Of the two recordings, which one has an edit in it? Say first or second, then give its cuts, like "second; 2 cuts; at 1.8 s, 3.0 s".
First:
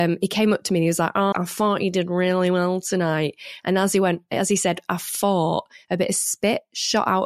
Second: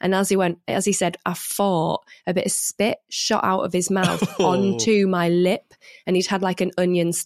first; 1 cut; at 1.3 s